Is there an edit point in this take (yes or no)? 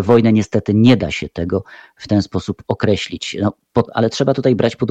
yes